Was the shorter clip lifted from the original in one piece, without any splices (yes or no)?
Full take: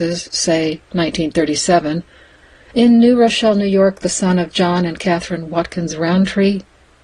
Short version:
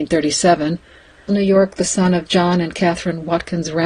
no